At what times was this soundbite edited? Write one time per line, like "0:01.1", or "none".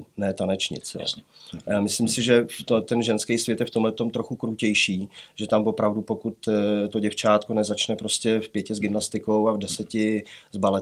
none

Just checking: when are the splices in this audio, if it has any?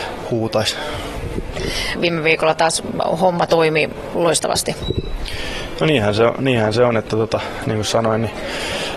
0:01.9
0:05.8

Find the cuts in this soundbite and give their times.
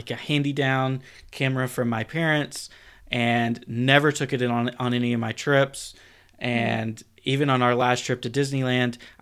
none

